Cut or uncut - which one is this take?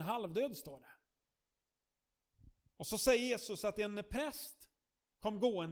uncut